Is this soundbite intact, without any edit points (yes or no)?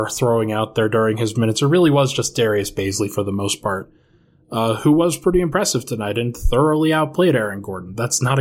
yes